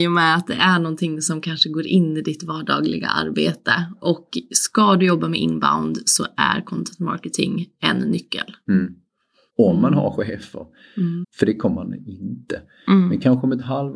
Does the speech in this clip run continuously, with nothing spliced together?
no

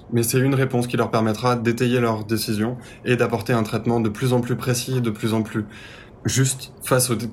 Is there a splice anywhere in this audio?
no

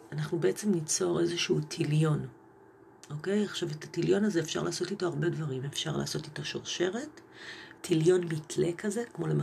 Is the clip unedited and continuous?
no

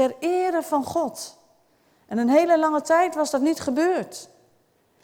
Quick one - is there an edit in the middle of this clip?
no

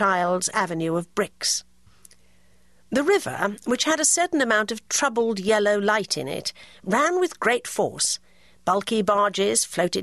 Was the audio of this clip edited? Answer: no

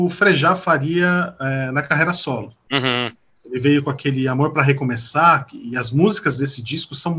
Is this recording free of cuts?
yes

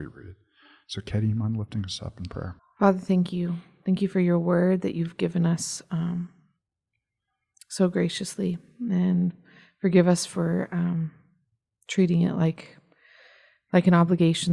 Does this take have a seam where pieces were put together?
yes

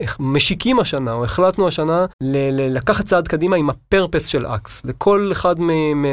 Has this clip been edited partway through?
yes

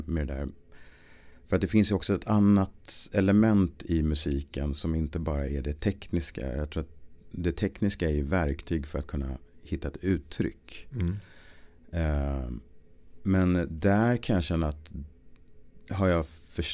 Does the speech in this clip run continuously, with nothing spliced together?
yes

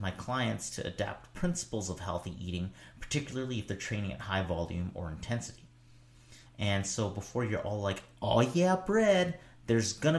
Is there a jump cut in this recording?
yes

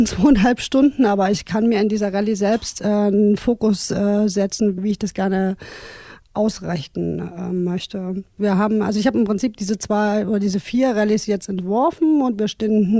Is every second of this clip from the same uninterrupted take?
no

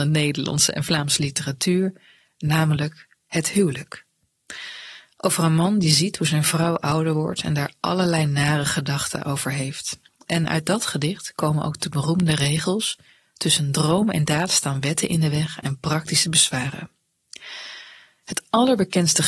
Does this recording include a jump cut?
yes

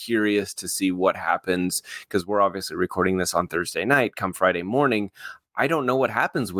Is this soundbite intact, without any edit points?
yes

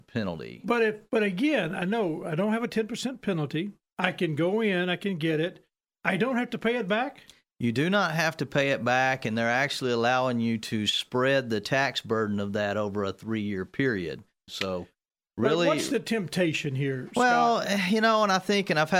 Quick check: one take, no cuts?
no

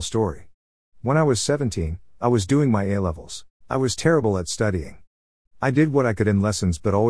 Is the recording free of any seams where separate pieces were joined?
no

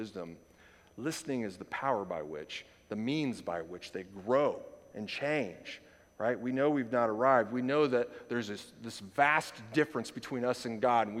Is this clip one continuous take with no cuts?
yes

